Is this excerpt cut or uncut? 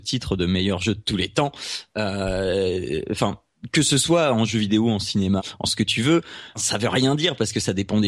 cut